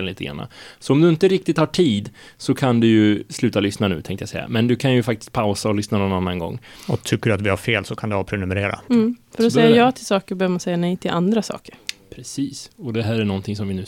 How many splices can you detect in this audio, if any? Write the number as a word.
one